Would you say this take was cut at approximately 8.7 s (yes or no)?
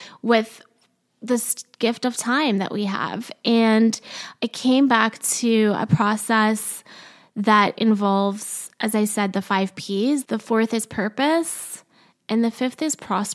no